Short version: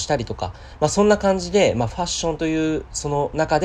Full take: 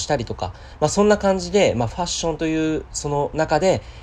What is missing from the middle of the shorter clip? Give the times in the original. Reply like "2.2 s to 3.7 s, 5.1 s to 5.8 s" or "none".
none